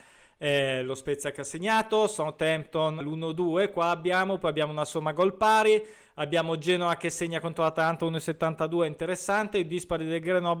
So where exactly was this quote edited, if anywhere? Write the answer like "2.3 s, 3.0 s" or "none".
3.0 s

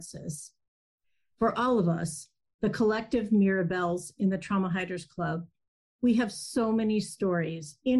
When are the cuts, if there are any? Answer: 1.3 s

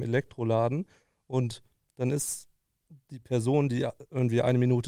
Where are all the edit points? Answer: none

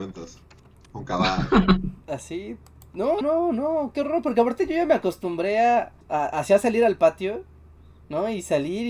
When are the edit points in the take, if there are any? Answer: 3.2 s, 6.0 s

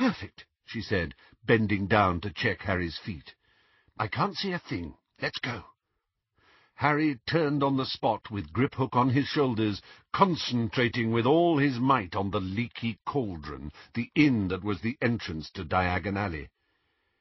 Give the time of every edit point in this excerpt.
none

